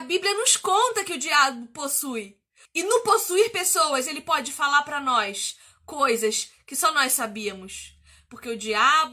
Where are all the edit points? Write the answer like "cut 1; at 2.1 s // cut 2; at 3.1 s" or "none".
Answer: cut 1; at 2.6 s